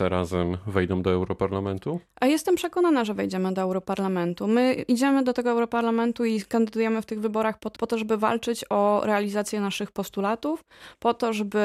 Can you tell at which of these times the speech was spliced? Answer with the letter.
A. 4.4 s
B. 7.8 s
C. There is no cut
B